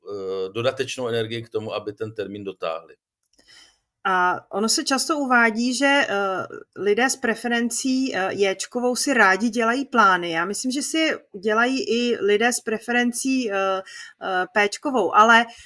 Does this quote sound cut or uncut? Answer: uncut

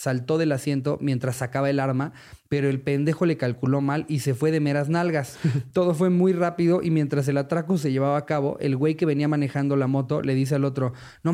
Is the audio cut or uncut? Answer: uncut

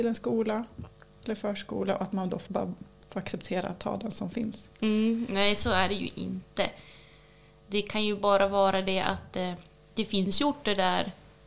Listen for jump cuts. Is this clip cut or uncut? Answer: cut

